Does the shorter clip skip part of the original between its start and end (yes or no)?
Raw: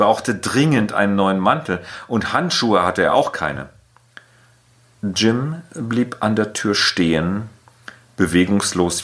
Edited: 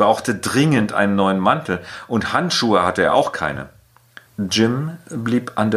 yes